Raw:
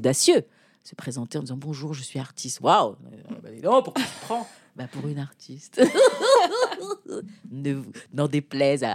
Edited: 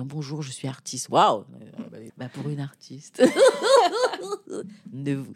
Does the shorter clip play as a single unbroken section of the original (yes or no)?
no